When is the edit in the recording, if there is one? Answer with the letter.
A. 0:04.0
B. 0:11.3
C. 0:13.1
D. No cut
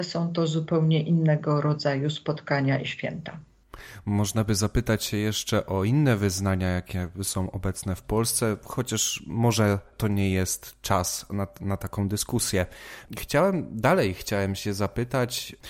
D